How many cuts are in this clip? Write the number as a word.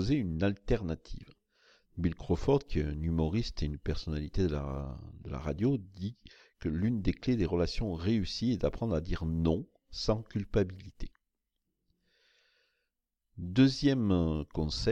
one